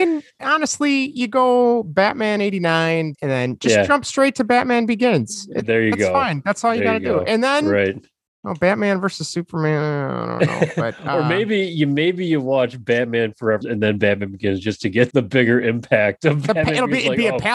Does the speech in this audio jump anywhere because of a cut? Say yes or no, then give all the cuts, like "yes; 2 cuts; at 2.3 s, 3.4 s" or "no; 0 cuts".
yes; 3 cuts; at 3.1 s, 13.6 s, 15.1 s